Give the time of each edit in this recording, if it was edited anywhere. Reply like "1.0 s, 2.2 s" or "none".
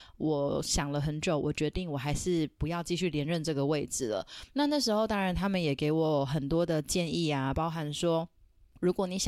none